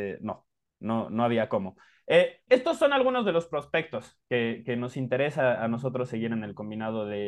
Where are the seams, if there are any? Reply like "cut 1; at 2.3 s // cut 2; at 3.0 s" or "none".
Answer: cut 1; at 2.5 s